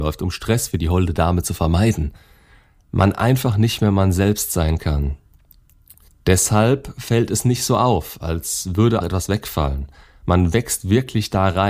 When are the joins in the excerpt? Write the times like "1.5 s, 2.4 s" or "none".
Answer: 6.1 s, 9.0 s

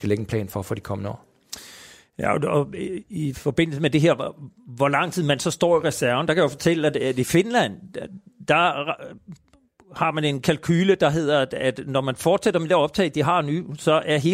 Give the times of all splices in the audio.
none

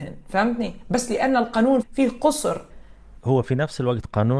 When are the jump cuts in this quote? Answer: 1.8 s

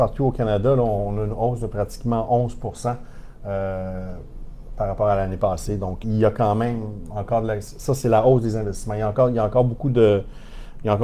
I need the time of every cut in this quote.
6.0 s

